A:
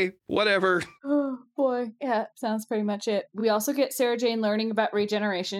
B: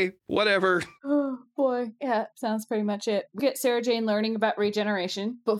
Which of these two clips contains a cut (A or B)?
B